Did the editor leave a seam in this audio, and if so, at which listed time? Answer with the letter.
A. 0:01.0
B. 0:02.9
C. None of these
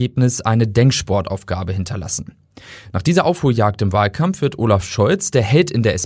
B